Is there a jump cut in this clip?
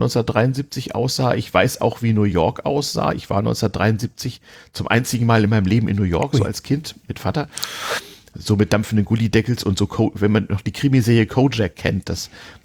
no; 0 cuts

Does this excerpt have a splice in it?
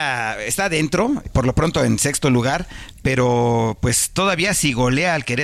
yes; 1 cut; at 1.2 s

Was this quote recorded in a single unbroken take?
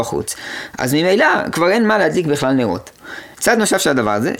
no; 1 cut; at 3.3 s

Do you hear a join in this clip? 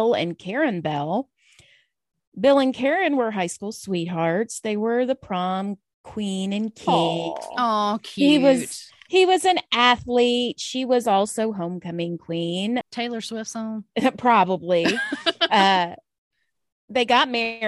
yes; 1 cut; at 12.8 s

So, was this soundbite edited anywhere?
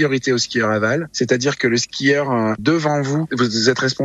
no; 0 cuts

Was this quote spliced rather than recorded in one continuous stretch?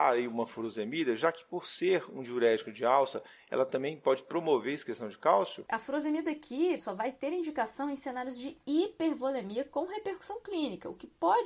yes; 2 cuts; at 5.7 s, 6.8 s

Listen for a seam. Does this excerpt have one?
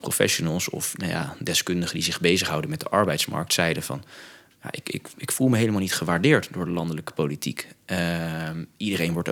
no; 0 cuts

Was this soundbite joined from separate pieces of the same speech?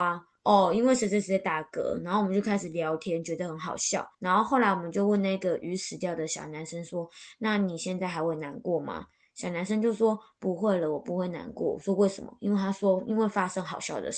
yes; 1 cut; at 4.1 s

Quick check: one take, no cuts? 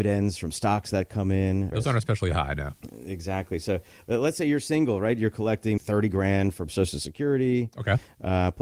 no; 2 cuts; at 1.7 s, 5.8 s

